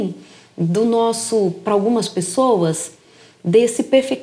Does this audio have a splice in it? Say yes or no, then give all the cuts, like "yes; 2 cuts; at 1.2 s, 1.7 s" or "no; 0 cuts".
no; 0 cuts